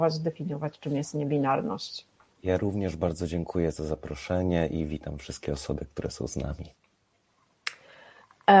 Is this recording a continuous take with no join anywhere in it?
no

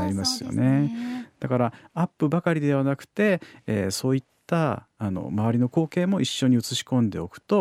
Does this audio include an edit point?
no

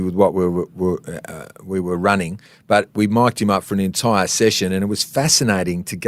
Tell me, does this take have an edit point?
no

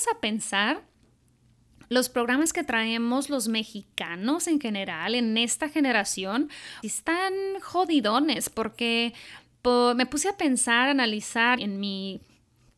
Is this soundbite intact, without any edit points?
no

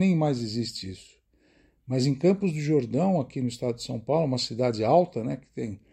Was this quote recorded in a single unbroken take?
yes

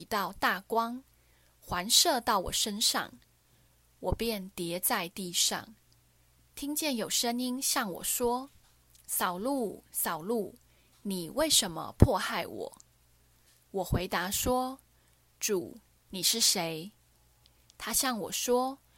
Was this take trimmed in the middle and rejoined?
no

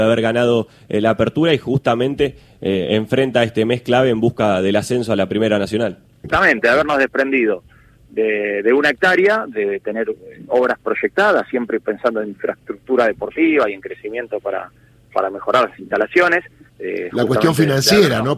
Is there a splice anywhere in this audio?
yes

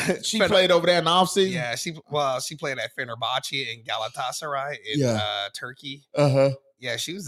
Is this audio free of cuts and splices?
yes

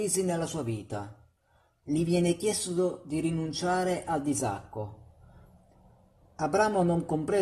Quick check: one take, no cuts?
yes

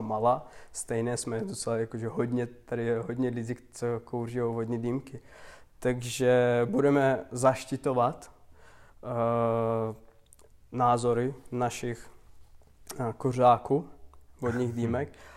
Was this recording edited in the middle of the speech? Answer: yes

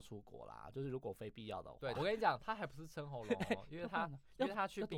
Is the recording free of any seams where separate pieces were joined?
no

